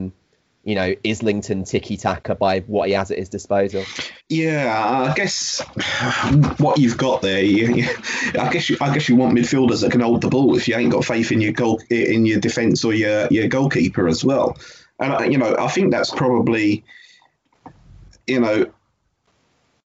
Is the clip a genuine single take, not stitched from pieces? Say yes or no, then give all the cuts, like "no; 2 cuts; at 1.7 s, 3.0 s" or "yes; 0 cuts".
no; 1 cut; at 4.2 s